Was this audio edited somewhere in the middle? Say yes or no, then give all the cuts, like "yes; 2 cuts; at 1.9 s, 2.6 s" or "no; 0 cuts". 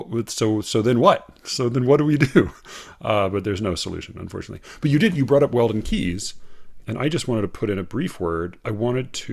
yes; 1 cut; at 6.8 s